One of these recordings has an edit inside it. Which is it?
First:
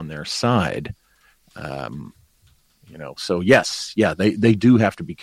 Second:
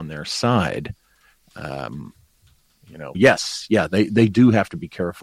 second; 1 cut; at 3.1 s

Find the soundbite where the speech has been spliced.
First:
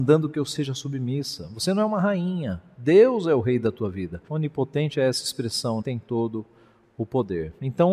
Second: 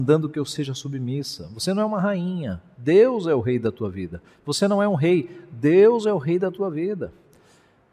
first; 2 cuts; at 4.3 s, 5.8 s

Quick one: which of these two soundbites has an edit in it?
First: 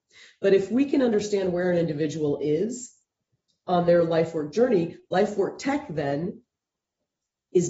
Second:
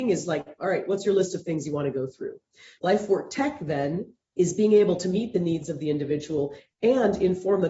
second; 2 cuts; at 2.8 s, 4.2 s

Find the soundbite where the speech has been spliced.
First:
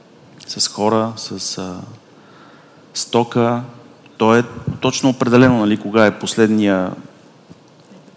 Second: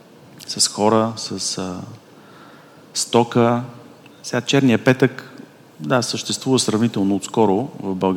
first; 1 cut; at 4.2 s

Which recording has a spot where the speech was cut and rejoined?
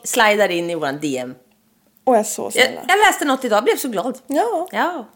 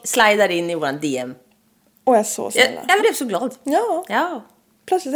second; 1 cut; at 3.0 s

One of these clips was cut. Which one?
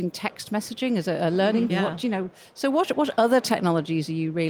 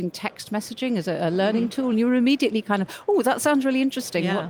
first; 1 cut; at 1.7 s

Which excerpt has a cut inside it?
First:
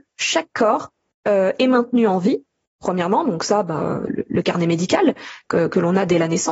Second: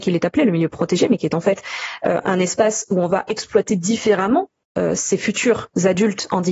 first; 1 cut; at 4.1 s

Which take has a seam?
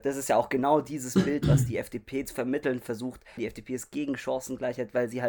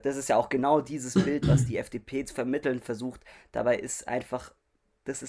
first; 1 cut; at 3.4 s

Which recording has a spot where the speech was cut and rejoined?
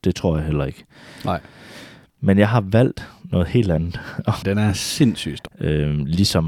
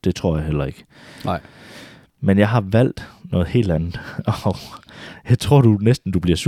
first; 2 cuts; at 4.4 s, 5.5 s

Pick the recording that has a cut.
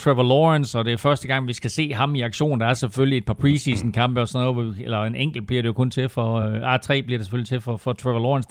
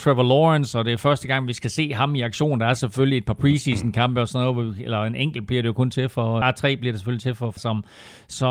second; 2 cuts; at 6.4 s, 7.6 s

